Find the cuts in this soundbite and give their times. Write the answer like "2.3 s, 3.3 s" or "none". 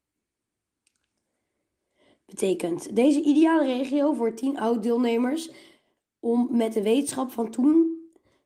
none

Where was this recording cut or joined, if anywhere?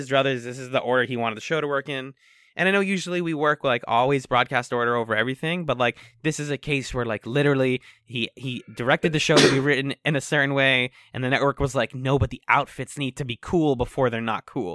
none

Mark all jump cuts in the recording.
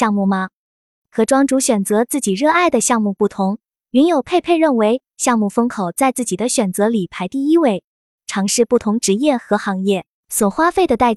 8.2 s, 10.1 s

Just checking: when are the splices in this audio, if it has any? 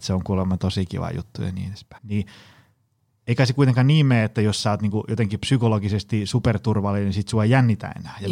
2.0 s

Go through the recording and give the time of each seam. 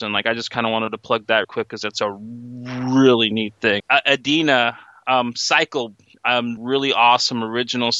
1.4 s, 3.8 s, 6.6 s

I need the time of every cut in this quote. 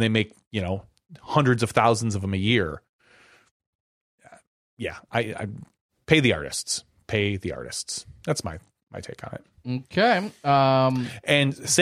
none

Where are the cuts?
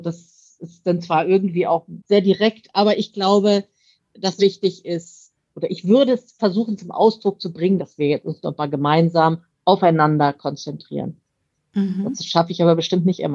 4.4 s, 7.8 s

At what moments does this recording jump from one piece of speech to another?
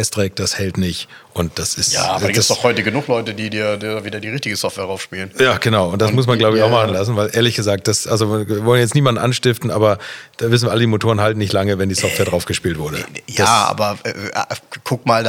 none

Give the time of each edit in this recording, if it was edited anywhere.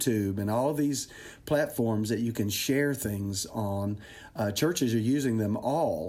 none

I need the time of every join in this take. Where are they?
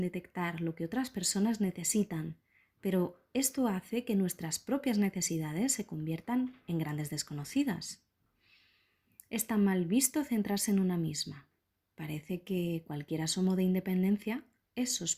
none

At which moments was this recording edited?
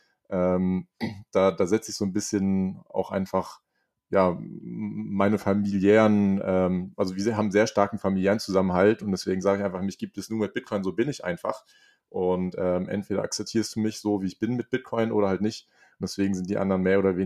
none

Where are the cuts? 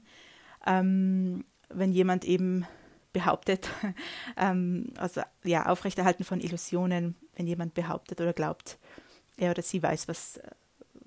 none

